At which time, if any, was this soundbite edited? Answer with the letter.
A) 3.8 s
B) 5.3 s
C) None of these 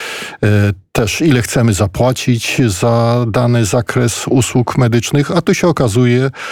C